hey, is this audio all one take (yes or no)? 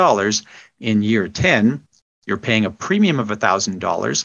yes